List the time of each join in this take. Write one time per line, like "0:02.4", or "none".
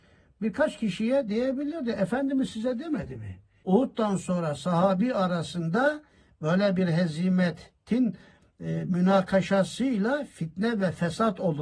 0:03.6